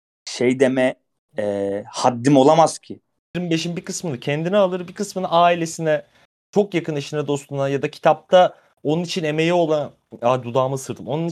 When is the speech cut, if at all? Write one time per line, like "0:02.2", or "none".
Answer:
0:03.3